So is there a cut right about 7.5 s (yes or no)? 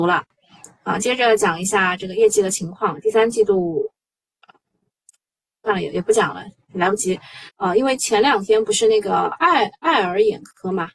yes